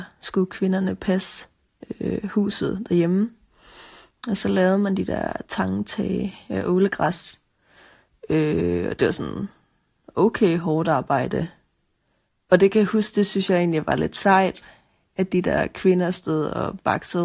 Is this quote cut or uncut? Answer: uncut